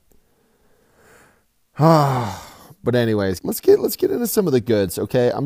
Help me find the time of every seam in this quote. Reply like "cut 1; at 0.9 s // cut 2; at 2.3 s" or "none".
cut 1; at 3.4 s